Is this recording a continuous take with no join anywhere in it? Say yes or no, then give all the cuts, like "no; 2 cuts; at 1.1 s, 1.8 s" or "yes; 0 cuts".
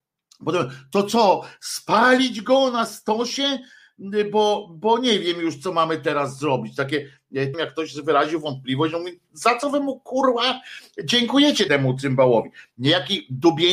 no; 2 cuts; at 7.5 s, 11.7 s